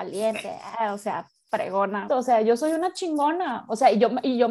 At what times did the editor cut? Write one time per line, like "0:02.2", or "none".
0:02.1